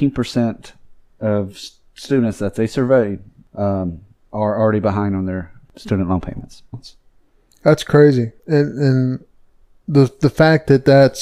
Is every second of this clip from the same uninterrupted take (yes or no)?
no